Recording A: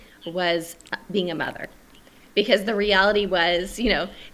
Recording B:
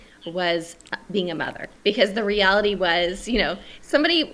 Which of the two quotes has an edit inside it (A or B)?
B